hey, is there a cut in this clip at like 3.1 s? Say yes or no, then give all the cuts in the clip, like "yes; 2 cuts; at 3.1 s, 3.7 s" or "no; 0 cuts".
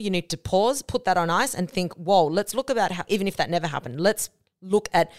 yes; 1 cut; at 3.1 s